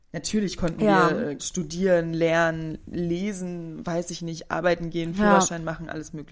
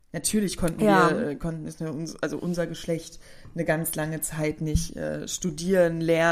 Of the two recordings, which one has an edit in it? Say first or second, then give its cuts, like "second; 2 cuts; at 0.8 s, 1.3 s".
first; 1 cut; at 1.4 s